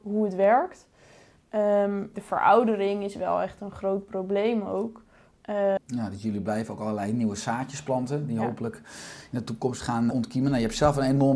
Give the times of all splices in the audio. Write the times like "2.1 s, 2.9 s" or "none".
2.1 s, 5.8 s, 10.1 s